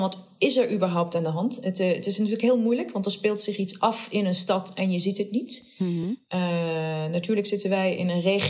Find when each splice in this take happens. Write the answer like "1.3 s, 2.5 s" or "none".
none

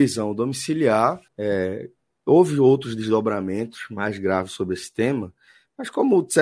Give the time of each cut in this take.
1.3 s

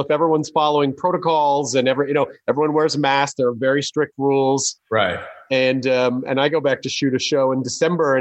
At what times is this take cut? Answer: none

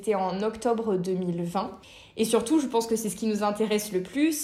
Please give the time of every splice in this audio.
none

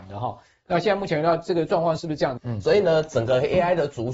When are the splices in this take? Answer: 2.4 s

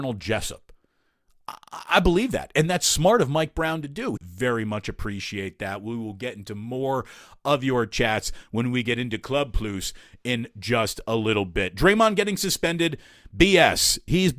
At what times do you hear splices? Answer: 4.2 s

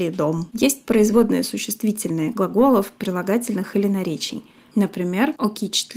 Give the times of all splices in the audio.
2.3 s, 4.7 s

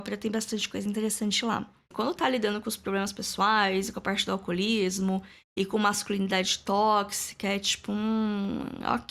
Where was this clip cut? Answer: 1.9 s

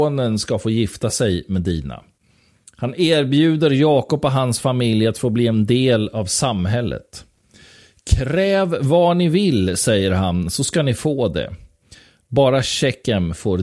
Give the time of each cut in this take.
none

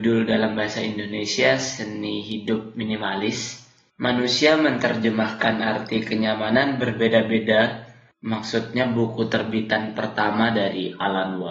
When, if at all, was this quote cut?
3.9 s, 8.1 s

